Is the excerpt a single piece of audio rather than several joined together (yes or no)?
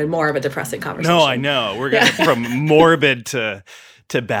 no